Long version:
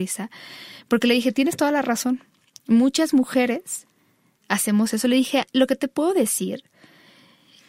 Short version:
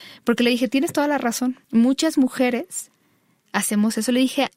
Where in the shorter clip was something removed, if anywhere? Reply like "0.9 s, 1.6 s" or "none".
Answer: 1.6 s